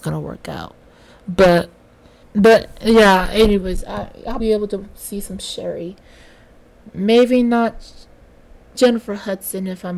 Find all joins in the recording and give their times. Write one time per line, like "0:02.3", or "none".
0:02.2
0:04.4
0:08.7